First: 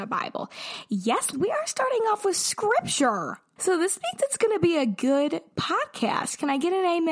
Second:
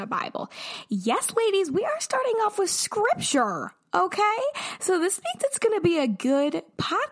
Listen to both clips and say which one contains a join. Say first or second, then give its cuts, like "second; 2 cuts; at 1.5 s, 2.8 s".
first; 2 cuts; at 1.3 s, 3.6 s